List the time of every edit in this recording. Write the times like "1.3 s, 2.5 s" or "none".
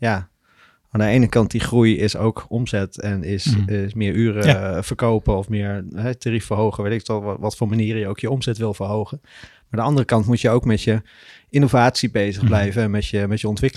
none